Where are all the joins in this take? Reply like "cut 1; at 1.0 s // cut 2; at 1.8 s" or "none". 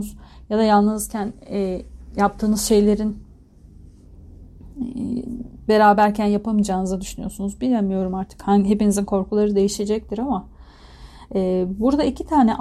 none